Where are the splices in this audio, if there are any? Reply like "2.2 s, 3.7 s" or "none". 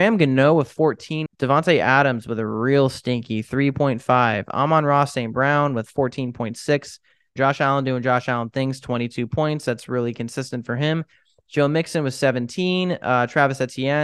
1.3 s, 7.4 s

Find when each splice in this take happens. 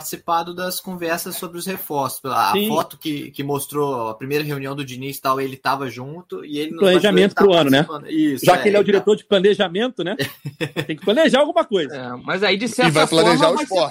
none

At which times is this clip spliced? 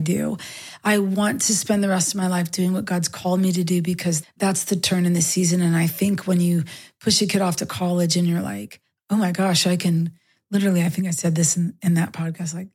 4.2 s

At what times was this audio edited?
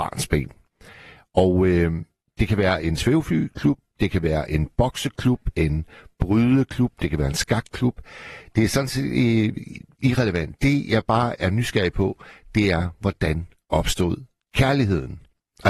none

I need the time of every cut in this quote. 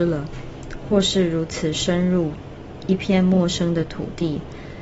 none

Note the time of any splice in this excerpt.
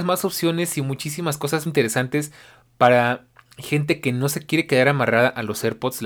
1.7 s

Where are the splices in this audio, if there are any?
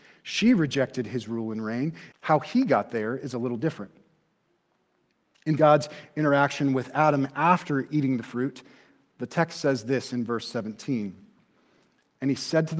2.1 s

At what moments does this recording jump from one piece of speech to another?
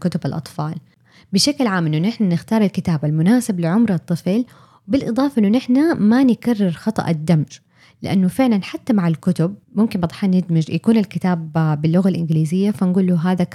9.6 s

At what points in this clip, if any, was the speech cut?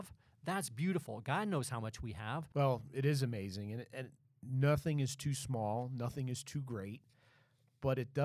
2.5 s

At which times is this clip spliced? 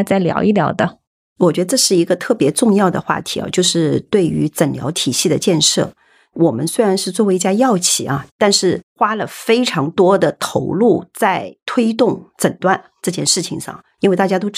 none

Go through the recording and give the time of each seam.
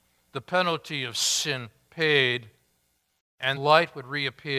3.6 s

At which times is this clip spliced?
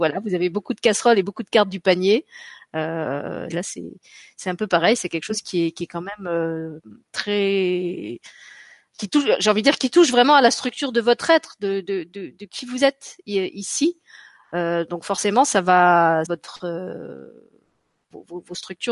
3.5 s, 16.3 s

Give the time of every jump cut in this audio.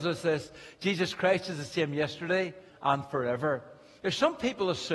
2.7 s

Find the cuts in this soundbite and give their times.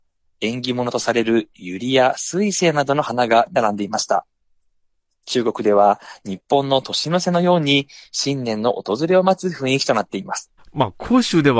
10.6 s

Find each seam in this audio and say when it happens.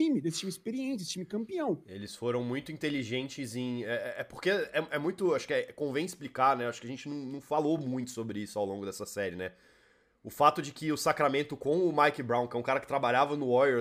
none

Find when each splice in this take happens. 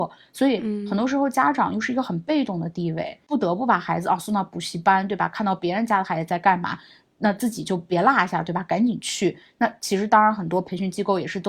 none

